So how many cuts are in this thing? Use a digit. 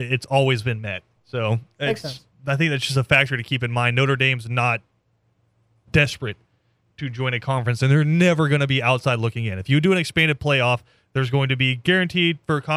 1